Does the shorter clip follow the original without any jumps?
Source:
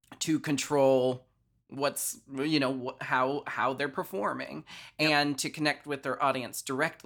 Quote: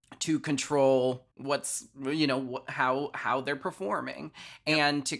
no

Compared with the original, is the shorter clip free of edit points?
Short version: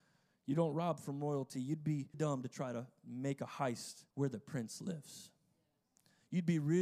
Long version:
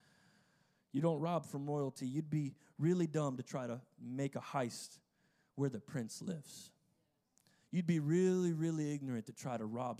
no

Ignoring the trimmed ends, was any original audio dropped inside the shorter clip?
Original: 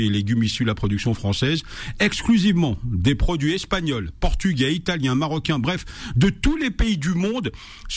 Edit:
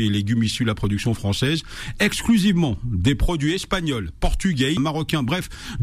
yes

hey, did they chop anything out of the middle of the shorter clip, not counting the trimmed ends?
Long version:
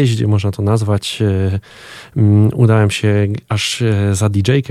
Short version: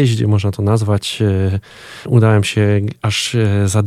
yes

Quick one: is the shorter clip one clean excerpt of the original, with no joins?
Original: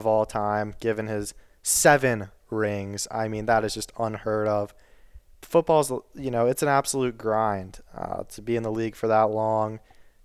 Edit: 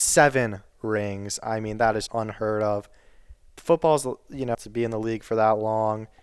no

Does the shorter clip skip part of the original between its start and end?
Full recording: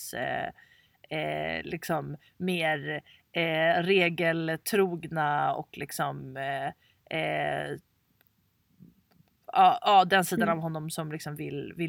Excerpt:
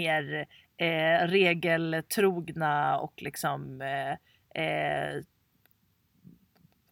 no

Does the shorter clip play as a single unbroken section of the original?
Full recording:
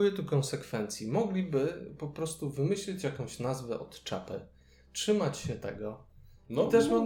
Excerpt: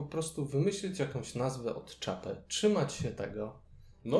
no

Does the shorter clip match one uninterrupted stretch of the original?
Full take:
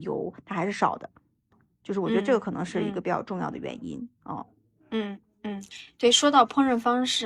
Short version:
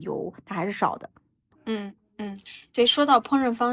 no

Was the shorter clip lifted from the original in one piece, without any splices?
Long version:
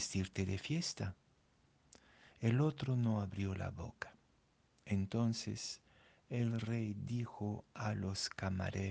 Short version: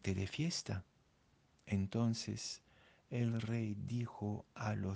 no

